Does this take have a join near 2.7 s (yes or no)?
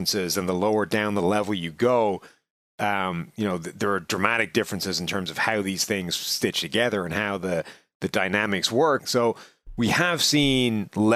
no